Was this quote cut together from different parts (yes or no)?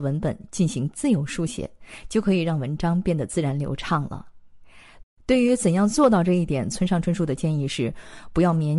yes